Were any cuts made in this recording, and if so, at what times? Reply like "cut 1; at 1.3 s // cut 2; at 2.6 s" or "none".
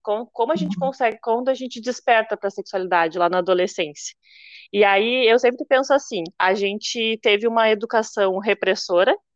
none